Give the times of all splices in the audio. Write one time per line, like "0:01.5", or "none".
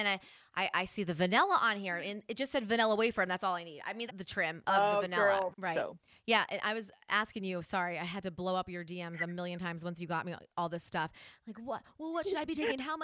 0:04.1
0:05.5